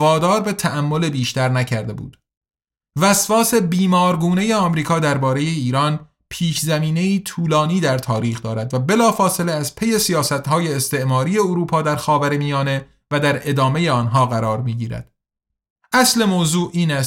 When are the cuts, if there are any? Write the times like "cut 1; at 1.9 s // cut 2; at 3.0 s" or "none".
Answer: none